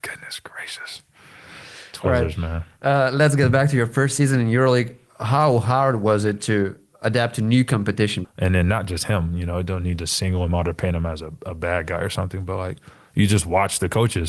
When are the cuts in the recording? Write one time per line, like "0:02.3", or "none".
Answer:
0:08.2